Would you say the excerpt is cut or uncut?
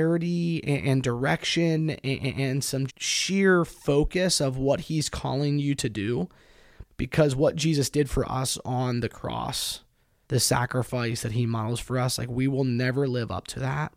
cut